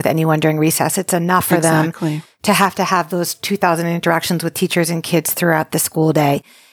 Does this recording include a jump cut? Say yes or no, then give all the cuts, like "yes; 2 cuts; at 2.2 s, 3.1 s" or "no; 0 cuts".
no; 0 cuts